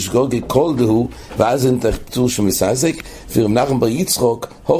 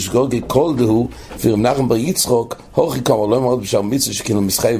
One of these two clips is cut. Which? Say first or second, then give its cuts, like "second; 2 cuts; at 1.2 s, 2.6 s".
second; 1 cut; at 1.4 s